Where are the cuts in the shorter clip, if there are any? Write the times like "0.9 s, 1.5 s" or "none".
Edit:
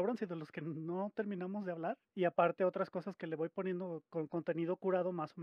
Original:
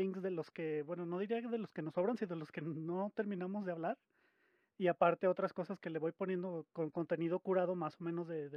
2.1 s